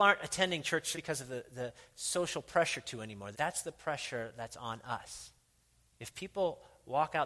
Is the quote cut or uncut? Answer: cut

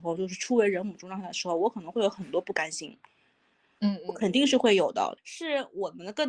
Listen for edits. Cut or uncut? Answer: cut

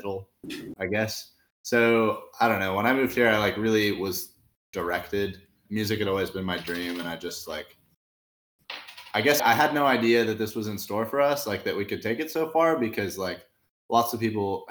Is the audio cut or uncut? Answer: cut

